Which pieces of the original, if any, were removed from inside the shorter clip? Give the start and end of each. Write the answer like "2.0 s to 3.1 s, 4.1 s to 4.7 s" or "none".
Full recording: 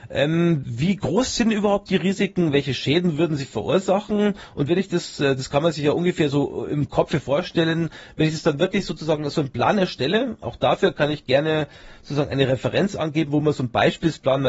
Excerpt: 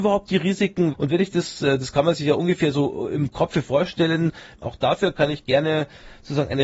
2.5 s to 4.5 s, 8.1 s to 10.4 s